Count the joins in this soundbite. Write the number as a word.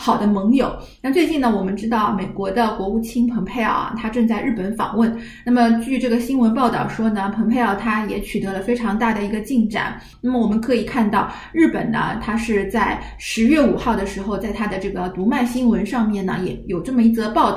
zero